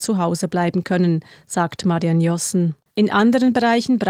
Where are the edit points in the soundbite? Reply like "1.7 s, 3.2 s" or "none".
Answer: 2.9 s